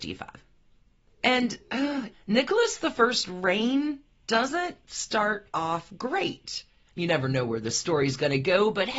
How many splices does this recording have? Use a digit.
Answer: 2